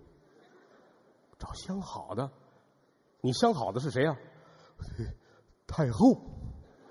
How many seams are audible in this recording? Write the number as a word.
zero